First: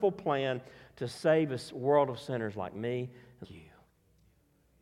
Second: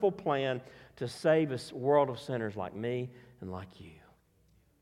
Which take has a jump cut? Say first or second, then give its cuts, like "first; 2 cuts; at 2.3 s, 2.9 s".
first; 1 cut; at 3.4 s